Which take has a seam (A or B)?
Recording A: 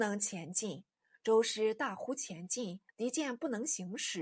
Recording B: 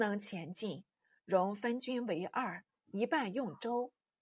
A